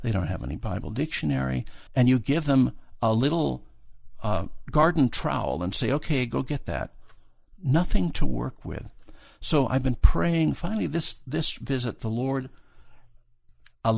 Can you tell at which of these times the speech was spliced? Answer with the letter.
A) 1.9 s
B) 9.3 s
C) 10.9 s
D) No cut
A